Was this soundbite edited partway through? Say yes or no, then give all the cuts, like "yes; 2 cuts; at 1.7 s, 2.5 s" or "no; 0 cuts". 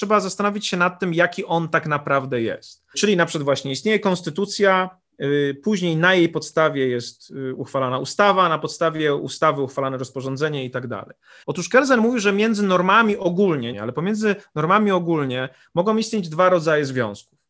yes; 3 cuts; at 2.9 s, 11.4 s, 13.7 s